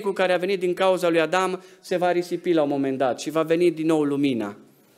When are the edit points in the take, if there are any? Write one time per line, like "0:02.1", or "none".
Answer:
none